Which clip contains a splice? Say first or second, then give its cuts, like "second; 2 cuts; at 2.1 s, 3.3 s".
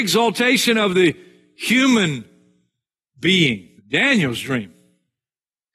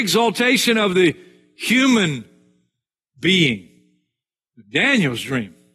first; 1 cut; at 3.8 s